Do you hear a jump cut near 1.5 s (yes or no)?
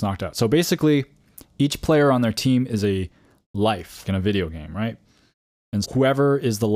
no